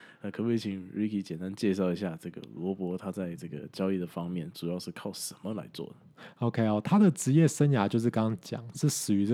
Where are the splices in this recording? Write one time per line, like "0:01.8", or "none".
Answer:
none